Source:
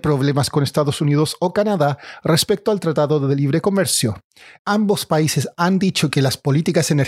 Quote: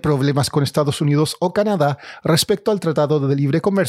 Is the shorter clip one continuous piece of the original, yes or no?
yes